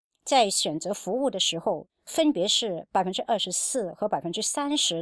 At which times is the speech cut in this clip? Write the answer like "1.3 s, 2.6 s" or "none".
1.9 s